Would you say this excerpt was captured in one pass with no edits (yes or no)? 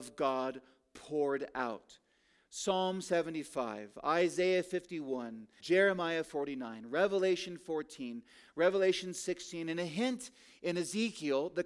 no